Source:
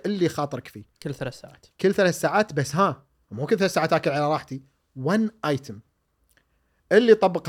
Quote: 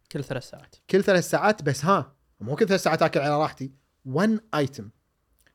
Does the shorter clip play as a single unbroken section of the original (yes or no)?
yes